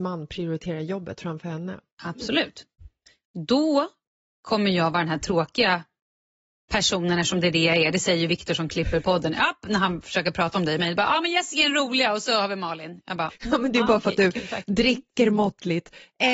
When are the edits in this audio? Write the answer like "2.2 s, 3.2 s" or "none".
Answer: none